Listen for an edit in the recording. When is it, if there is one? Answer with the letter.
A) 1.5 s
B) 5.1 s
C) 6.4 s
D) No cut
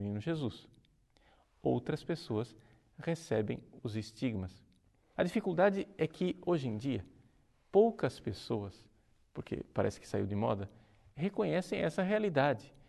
B